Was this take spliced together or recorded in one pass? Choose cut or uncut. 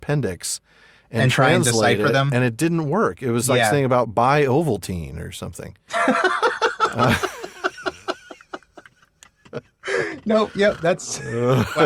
uncut